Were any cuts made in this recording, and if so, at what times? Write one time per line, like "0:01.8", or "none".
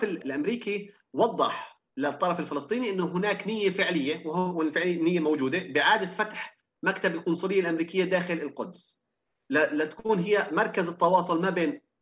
none